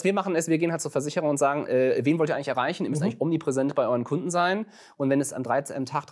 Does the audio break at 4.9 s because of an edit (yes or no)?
no